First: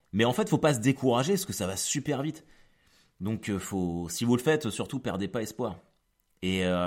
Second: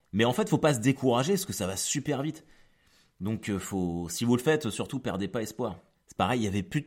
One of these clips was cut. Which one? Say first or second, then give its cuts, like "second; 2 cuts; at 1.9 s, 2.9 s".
second; 1 cut; at 5.9 s